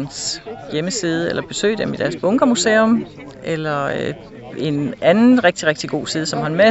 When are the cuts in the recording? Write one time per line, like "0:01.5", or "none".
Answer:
none